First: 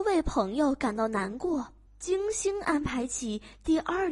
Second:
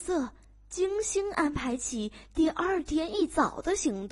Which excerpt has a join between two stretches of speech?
first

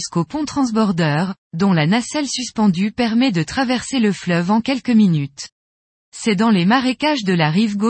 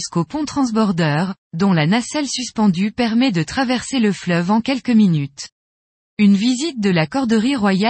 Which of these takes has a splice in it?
second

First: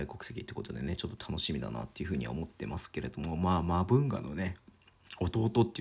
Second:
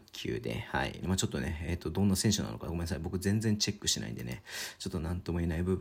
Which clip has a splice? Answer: second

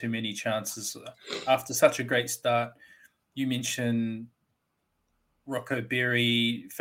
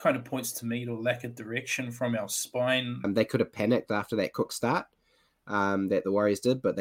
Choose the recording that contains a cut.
second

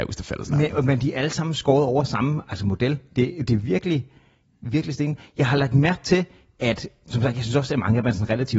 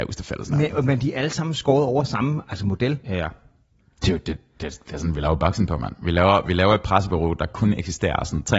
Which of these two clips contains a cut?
second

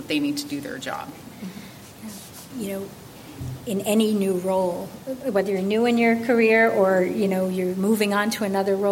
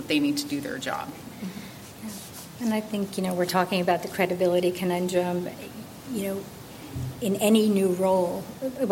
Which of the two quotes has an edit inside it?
first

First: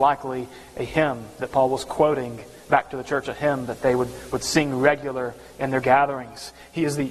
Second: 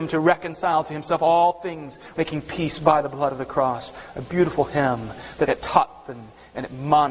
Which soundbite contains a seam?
second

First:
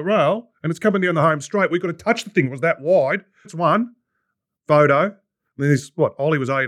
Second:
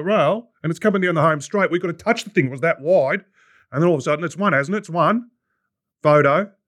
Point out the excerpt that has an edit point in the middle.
first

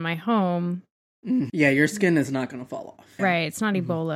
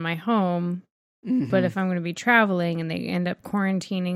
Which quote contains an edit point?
first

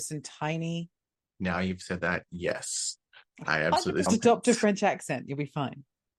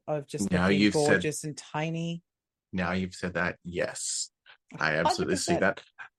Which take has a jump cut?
first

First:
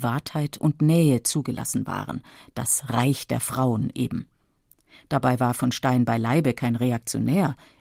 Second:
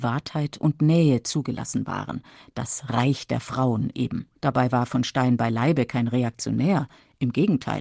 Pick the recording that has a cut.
second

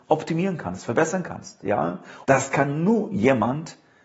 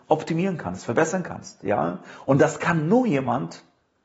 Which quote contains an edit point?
first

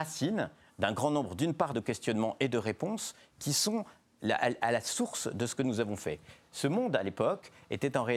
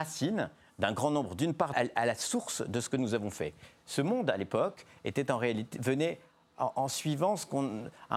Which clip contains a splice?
second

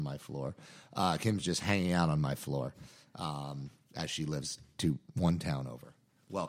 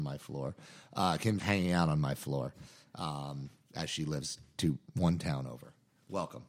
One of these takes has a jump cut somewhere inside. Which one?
second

